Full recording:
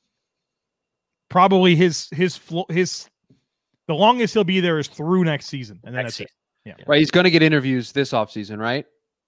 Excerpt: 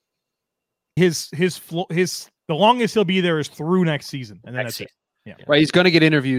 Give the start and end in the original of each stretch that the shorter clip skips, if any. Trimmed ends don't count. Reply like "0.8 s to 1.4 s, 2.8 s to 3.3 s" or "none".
1.2 s to 1.8 s, 3.2 s to 3.8 s